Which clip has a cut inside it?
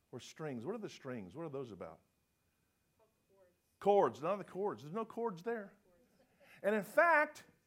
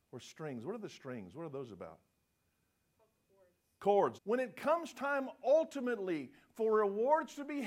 second; 1 cut; at 4.2 s

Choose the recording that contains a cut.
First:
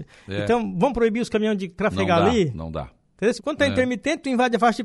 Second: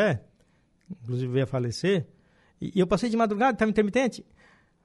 first; 1 cut; at 3.4 s

